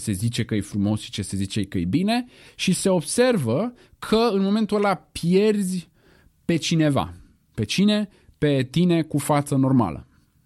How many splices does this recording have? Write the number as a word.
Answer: zero